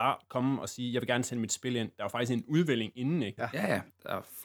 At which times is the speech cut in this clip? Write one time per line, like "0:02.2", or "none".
0:03.4